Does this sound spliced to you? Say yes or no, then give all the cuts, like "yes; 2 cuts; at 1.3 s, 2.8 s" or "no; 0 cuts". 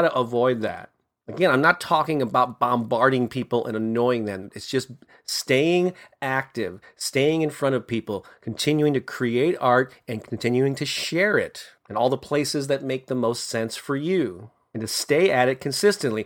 yes; 1 cut; at 4.5 s